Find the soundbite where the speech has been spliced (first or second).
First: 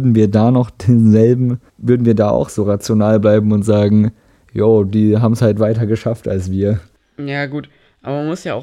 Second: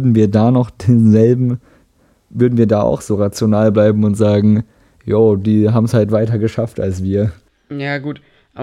first